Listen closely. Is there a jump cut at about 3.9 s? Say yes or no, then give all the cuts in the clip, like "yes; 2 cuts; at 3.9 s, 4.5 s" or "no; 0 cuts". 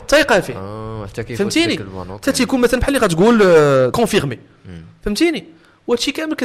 yes; 1 cut; at 3.9 s